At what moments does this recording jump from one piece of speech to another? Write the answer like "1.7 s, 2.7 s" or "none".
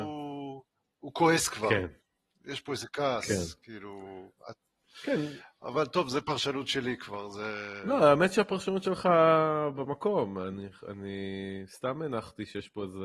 none